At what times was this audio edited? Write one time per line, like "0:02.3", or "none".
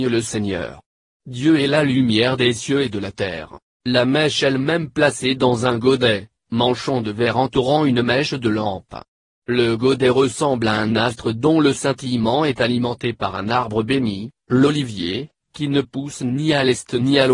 0:03.7